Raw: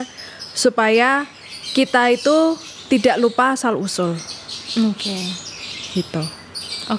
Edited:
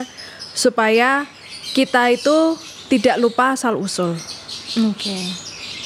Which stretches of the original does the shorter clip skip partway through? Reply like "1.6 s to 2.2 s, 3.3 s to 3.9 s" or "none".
none